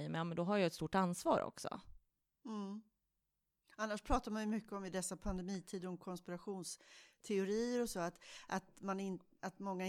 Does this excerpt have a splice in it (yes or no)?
no